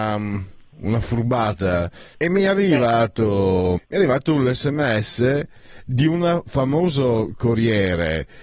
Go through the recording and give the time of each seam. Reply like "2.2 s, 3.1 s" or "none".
2.1 s, 3.8 s